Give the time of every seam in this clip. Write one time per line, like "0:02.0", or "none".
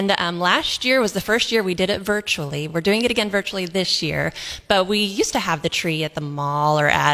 none